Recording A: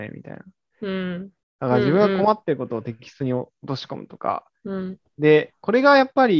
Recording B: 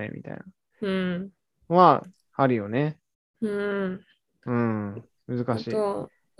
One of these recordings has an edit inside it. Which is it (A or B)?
A